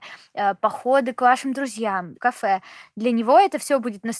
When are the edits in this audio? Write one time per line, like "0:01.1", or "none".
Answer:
0:02.1